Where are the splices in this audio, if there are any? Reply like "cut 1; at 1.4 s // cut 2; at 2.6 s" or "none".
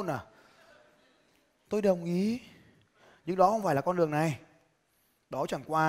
none